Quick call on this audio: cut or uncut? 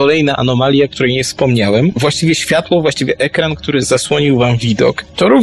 uncut